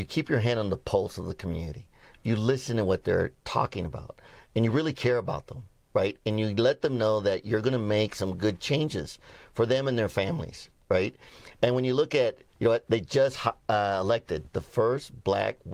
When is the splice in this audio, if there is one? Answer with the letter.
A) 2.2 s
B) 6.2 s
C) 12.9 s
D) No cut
C